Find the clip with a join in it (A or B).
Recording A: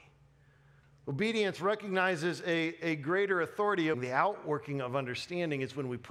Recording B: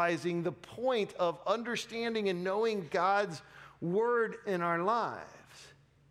A